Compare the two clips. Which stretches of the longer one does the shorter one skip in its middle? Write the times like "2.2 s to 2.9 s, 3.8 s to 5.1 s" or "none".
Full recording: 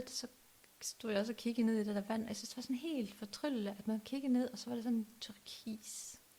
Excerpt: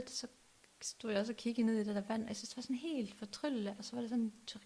3.8 s to 4.5 s